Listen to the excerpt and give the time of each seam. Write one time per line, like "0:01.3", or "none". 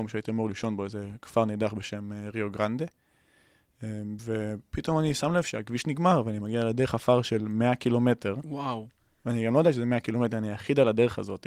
none